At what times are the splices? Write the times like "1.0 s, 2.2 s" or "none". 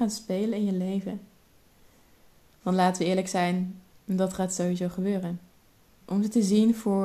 6.0 s